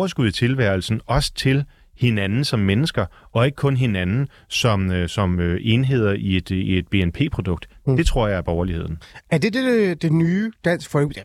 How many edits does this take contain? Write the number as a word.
zero